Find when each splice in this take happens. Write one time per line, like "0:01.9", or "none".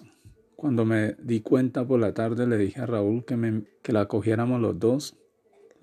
0:03.7